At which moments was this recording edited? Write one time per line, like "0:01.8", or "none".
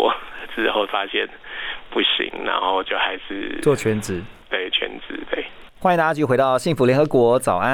0:02.8
0:05.7